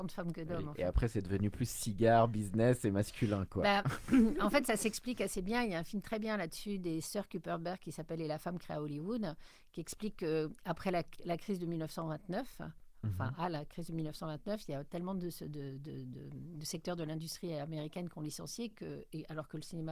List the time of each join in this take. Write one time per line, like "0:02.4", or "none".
none